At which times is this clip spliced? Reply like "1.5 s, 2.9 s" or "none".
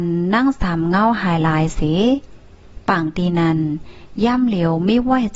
none